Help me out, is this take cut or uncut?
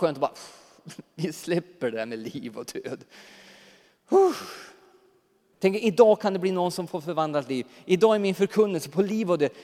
cut